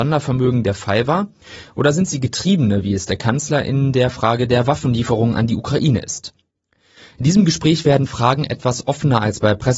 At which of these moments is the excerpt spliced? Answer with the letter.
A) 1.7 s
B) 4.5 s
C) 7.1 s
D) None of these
C